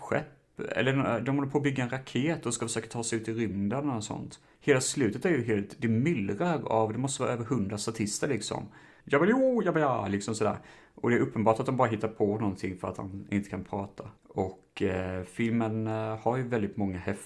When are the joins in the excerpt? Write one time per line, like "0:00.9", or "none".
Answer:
0:04.5
0:09.0
0:14.2